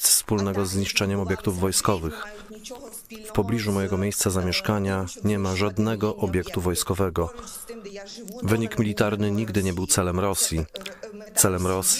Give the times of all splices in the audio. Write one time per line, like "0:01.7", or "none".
0:08.4